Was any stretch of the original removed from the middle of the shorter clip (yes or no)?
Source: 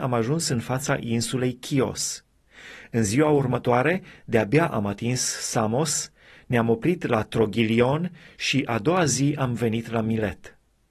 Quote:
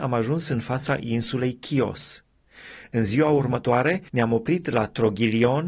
yes